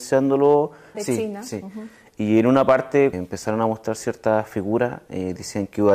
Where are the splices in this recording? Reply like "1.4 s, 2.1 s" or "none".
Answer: 0.9 s, 3.1 s